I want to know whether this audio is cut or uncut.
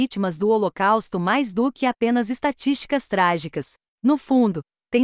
cut